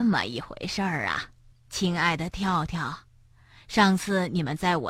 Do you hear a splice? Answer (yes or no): yes